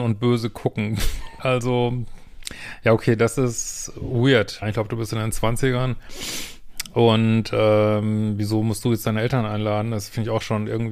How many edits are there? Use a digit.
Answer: 2